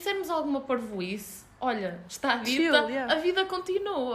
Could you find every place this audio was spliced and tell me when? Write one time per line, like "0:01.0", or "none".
none

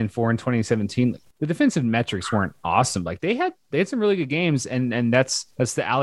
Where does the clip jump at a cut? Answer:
none

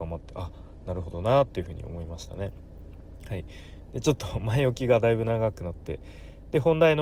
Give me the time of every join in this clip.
none

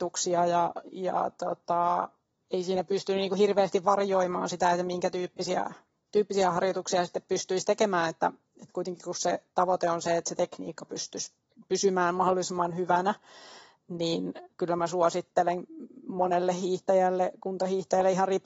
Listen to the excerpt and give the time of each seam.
none

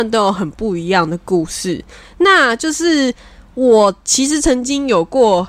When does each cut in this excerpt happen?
none

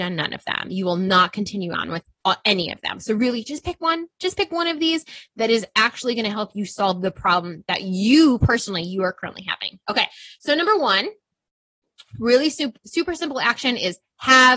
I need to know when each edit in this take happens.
none

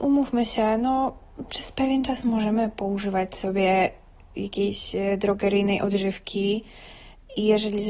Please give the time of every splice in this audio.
none

